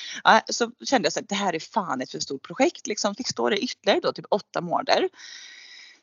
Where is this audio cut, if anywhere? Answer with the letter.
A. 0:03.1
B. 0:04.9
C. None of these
A